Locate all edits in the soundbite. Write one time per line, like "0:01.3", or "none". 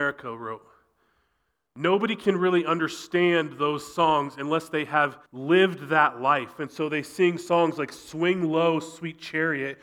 0:05.3